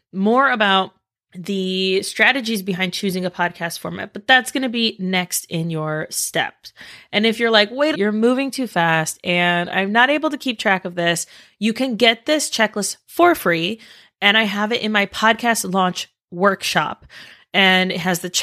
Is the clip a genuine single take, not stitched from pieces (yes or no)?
no